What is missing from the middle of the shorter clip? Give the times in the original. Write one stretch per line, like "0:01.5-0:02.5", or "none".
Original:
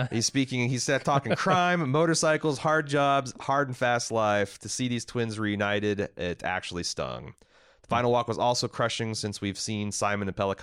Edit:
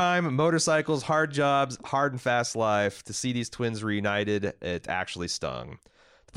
none